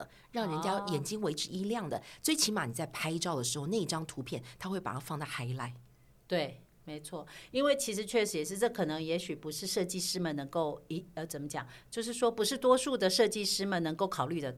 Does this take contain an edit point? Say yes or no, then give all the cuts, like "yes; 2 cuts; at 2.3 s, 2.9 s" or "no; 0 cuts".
no; 0 cuts